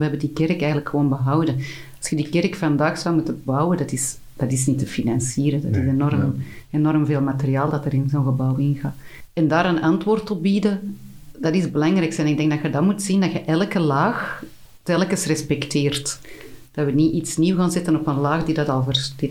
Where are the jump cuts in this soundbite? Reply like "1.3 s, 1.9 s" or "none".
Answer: none